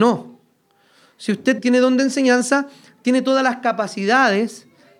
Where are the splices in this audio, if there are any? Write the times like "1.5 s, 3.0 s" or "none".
1.6 s